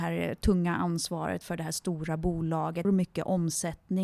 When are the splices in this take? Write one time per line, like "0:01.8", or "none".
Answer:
0:02.8